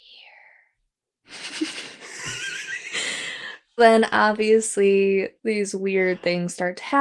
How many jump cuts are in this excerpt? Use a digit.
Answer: 2